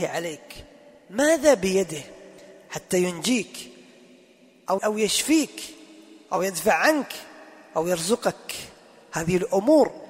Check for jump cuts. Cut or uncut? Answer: cut